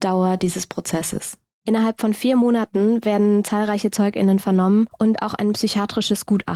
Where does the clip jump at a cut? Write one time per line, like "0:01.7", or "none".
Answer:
none